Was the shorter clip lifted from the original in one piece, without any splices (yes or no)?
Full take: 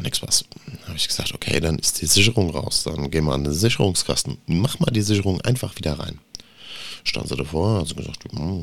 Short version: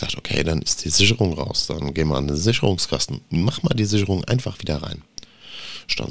yes